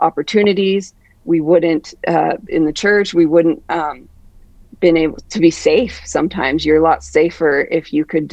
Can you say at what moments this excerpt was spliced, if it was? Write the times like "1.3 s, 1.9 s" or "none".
2.5 s